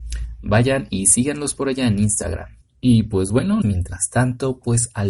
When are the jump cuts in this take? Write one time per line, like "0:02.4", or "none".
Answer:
0:02.6
0:03.6